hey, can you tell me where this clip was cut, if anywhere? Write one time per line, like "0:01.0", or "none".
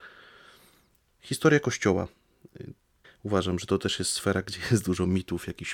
0:03.0